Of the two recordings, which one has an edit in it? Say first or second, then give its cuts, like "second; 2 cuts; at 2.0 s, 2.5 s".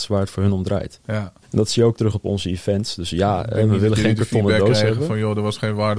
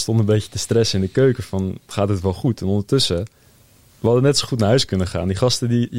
first; 1 cut; at 1.4 s